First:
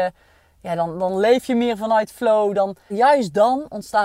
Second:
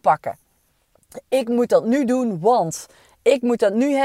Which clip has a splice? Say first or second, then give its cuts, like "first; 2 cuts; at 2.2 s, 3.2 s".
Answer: first; 1 cut; at 2.9 s